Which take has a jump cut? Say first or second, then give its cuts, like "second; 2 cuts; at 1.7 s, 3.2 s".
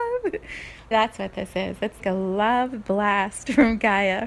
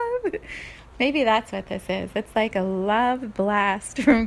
first; 2 cuts; at 0.9 s, 2.0 s